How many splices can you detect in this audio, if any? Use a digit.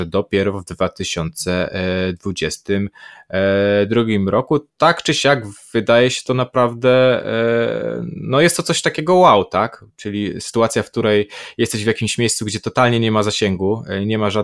1